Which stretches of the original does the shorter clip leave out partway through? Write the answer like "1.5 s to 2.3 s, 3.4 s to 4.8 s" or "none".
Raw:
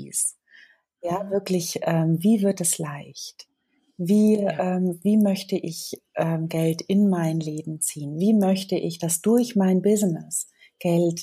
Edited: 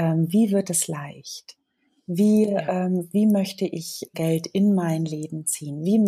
6.0 s to 6.5 s